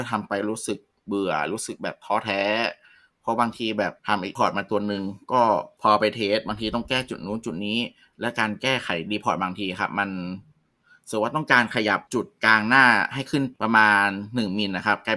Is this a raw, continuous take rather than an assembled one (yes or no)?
no